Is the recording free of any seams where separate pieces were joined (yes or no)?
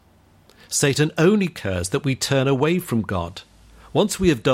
yes